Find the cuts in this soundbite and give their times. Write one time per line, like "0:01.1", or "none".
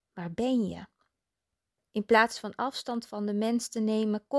0:01.8